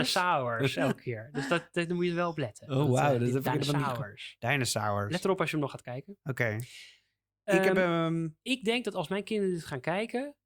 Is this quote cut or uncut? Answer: uncut